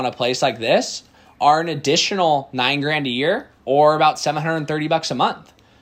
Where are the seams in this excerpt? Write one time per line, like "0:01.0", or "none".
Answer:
none